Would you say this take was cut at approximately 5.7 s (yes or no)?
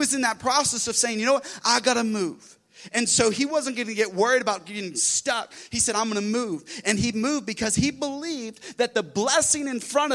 no